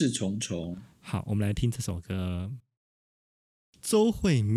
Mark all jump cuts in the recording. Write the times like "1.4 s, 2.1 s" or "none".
none